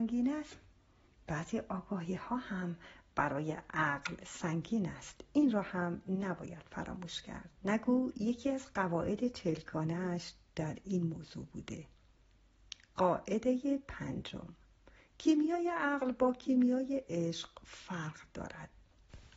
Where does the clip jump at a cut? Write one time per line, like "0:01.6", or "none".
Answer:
0:07.6

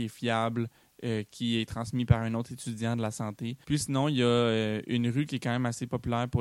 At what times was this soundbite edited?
0:03.6

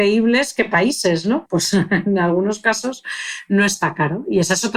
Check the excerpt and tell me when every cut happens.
0:01.5

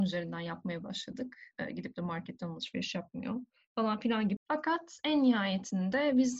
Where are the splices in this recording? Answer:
0:01.5
0:04.4

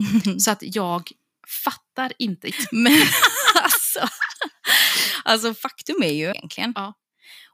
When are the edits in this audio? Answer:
0:02.5
0:06.3

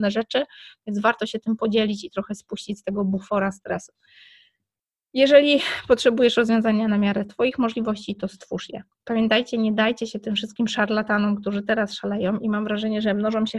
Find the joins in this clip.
none

